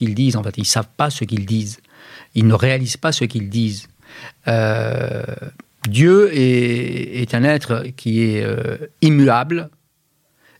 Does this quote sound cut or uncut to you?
uncut